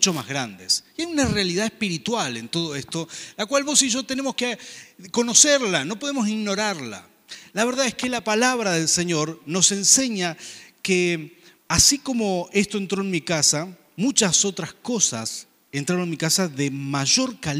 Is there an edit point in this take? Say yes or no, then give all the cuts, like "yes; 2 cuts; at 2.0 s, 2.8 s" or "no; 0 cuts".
yes; 1 cut; at 11.6 s